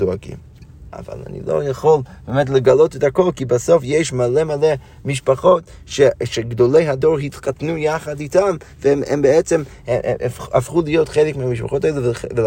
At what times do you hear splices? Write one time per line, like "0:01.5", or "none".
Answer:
0:00.9